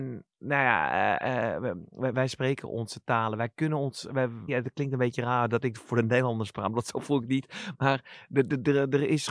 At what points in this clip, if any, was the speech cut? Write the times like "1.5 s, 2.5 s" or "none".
2.1 s, 4.5 s